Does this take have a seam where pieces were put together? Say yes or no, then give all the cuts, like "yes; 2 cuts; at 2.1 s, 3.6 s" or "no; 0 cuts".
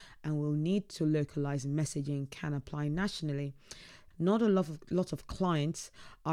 yes; 1 cut; at 4.1 s